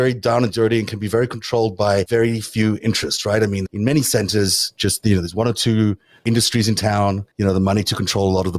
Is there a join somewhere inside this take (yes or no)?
yes